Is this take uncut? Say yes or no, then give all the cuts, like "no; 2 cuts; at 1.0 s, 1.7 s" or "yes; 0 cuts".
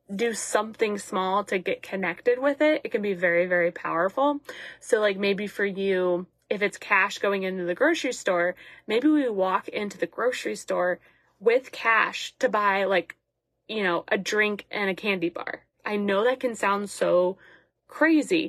yes; 0 cuts